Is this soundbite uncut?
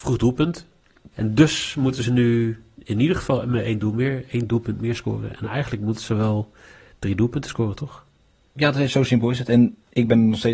no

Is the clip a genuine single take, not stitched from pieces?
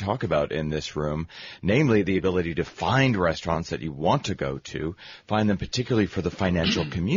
yes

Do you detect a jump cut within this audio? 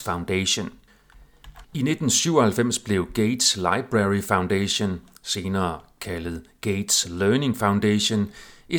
yes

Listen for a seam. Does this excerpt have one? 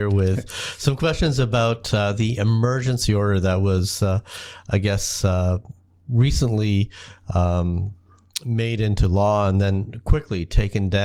no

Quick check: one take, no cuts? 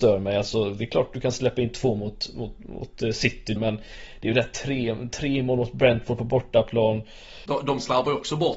no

